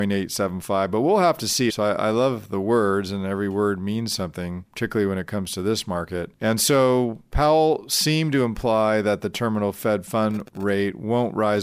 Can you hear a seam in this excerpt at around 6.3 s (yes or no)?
no